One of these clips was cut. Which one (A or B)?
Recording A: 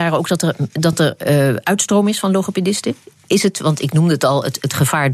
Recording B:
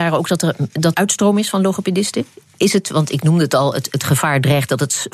B